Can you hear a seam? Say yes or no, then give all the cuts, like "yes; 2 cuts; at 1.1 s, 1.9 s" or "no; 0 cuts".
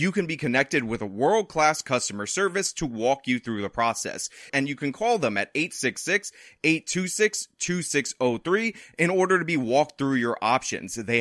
yes; 1 cut; at 4.5 s